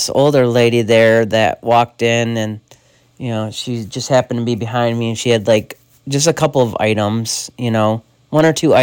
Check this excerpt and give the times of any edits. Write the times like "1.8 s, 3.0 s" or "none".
none